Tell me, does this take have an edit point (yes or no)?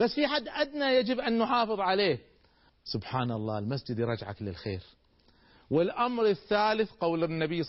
yes